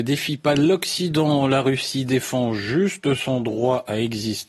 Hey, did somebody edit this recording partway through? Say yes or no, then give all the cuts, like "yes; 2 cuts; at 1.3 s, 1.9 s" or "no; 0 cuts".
no; 0 cuts